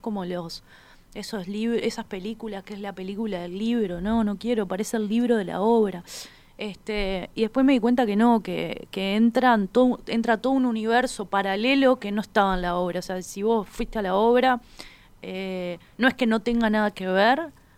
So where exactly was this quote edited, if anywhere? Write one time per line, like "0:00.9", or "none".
none